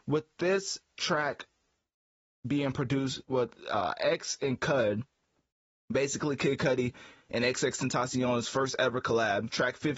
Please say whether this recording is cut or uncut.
uncut